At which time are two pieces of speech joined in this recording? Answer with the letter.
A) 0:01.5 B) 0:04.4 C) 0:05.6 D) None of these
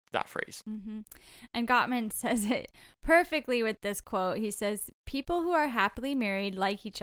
D